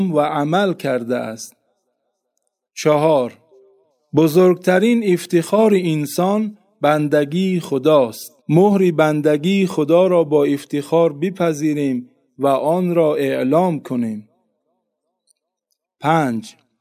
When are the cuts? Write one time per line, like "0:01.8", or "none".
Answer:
0:02.6
0:08.4